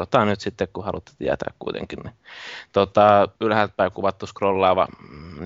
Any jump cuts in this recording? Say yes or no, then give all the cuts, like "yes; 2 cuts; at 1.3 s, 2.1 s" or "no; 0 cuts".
yes; 1 cut; at 3.4 s